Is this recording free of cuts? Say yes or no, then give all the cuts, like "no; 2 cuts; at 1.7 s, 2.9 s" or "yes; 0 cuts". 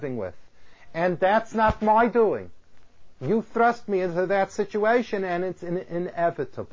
yes; 0 cuts